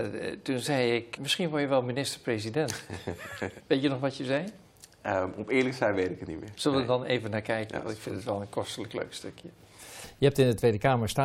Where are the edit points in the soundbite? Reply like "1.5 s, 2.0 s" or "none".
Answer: 1.2 s, 3.6 s